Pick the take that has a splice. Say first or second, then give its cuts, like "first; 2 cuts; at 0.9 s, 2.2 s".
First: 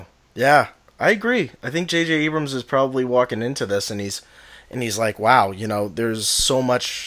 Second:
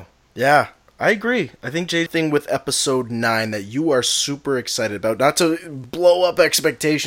second; 1 cut; at 2.1 s